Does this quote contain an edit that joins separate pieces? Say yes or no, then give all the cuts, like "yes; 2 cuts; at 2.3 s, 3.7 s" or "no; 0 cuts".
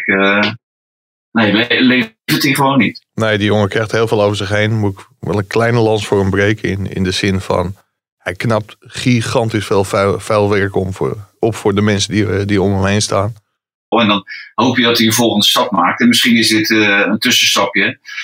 yes; 1 cut; at 13.9 s